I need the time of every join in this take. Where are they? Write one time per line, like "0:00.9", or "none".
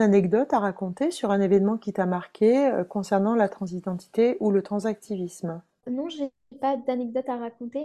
0:05.8